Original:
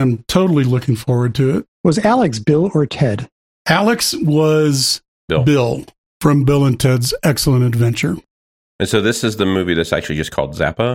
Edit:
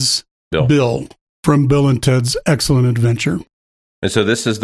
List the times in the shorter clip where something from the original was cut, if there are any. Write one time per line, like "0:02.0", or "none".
none